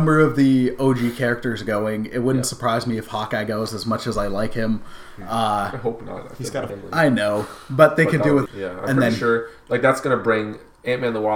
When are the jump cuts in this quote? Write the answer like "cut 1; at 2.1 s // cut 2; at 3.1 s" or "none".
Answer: cut 1; at 6.7 s // cut 2; at 8.5 s